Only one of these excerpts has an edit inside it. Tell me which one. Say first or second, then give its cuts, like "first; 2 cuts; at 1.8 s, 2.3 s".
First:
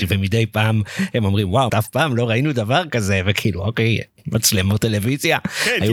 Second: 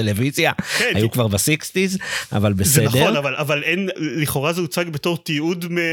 first; 1 cut; at 1.7 s